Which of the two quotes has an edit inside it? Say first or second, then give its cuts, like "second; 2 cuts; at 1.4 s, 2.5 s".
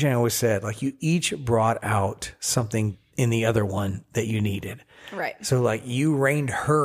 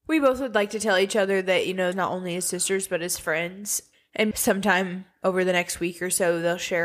second; 2 cuts; at 1.9 s, 4.3 s